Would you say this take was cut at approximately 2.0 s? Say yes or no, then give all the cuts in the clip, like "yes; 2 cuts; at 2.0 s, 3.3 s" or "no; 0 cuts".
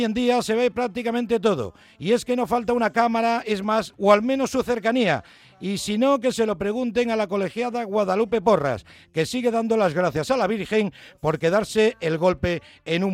no; 1 cut; at 3.9 s